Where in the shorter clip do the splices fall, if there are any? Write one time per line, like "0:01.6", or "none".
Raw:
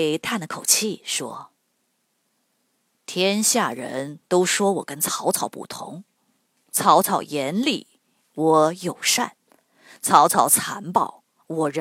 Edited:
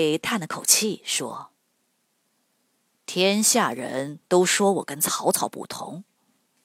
none